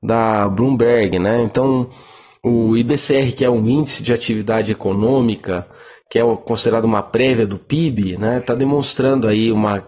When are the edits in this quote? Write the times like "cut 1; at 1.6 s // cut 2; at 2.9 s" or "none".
none